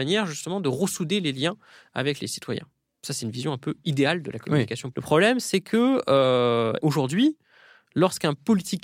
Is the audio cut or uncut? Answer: cut